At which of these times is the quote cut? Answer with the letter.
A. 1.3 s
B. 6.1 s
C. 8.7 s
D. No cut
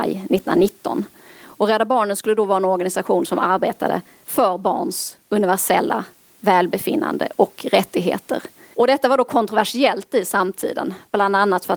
C